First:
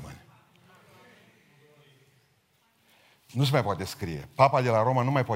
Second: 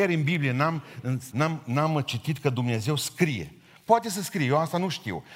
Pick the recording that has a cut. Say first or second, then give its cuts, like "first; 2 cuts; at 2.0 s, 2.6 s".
second; 1 cut; at 1.3 s